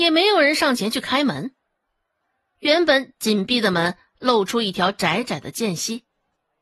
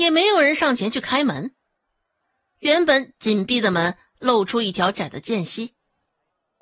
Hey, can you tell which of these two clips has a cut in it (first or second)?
second